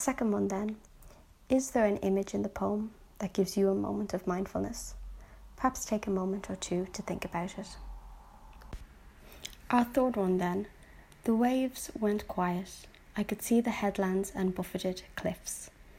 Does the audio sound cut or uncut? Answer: uncut